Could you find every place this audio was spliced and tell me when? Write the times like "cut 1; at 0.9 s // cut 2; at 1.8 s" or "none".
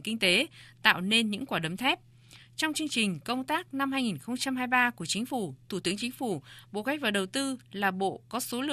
none